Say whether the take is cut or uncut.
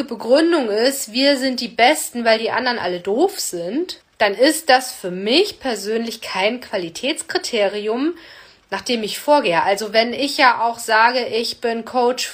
cut